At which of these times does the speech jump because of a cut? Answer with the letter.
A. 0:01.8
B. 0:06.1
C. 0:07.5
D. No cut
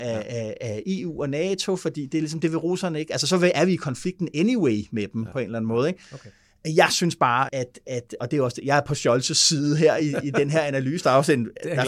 C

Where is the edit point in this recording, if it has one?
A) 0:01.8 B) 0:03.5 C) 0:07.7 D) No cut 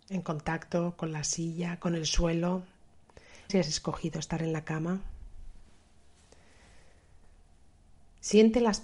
B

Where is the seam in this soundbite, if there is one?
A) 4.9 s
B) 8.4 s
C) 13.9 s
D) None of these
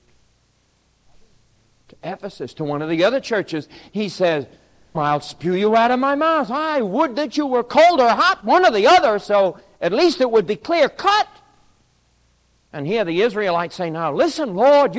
A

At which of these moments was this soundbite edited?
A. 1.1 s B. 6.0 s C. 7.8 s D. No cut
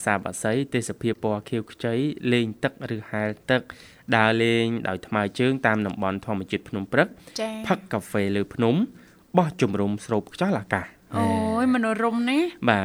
A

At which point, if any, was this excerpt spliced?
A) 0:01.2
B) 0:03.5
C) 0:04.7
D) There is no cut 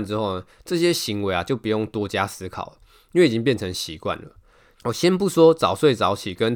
C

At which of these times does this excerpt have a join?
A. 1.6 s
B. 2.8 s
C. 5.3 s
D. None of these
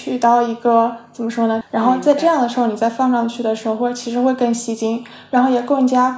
A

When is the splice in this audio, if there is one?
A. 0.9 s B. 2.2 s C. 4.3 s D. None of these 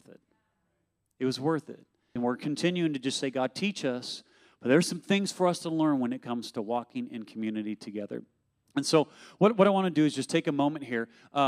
B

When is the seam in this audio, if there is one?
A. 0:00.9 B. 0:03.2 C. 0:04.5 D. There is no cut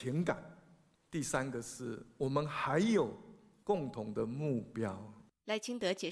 A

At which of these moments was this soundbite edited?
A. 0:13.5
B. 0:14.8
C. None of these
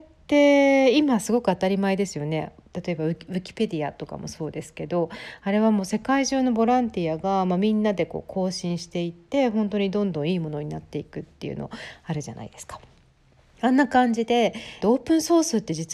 B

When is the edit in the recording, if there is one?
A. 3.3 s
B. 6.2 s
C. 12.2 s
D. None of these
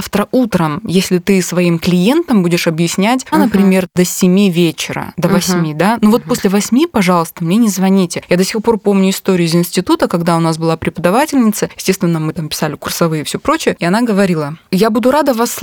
A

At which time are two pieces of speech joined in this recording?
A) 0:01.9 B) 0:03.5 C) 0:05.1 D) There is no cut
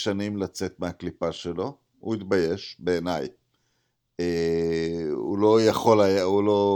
D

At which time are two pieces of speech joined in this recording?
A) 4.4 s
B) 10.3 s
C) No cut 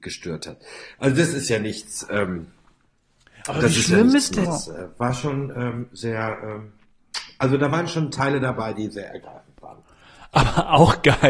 A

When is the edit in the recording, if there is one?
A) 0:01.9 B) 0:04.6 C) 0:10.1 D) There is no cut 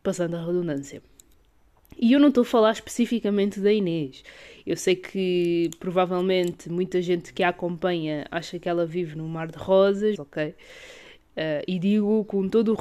C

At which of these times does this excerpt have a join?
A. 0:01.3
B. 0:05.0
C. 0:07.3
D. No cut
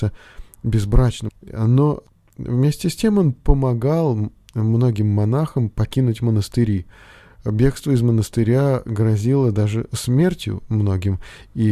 A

